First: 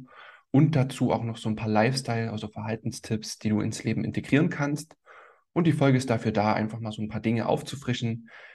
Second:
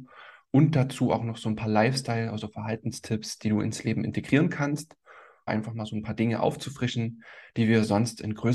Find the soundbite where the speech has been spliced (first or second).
second